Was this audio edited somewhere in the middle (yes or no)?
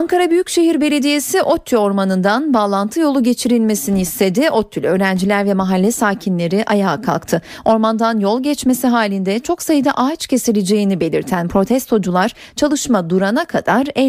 no